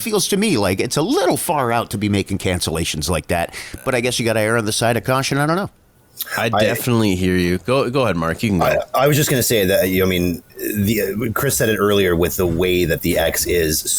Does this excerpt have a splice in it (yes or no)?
yes